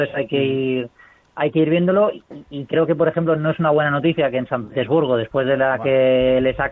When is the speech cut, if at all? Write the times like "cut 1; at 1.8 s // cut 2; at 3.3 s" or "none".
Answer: none